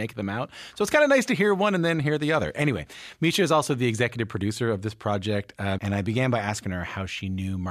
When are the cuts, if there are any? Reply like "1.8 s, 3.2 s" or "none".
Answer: 5.8 s